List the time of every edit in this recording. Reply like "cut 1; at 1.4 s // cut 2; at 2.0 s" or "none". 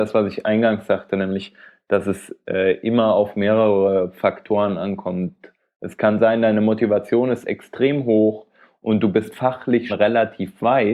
cut 1; at 9.9 s

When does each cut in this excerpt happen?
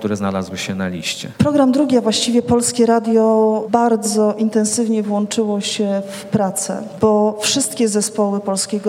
cut 1; at 1.4 s

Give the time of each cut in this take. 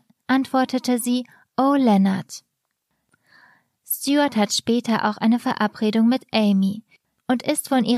none

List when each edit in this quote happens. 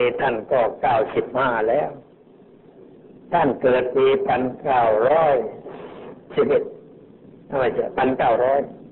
cut 1; at 6.2 s

